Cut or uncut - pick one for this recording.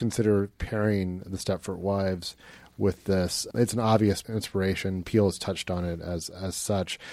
uncut